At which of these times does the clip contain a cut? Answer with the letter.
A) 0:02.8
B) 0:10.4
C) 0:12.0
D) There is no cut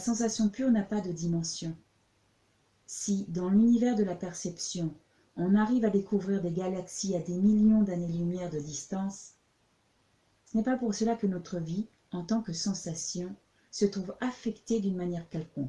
A